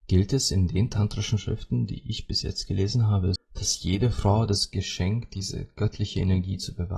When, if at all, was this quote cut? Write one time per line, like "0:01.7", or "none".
0:03.4